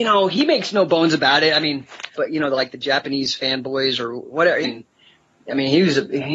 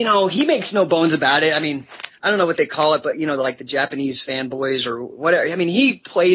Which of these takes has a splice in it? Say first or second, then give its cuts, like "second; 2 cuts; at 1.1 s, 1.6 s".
first; 2 cuts; at 2.2 s, 4.6 s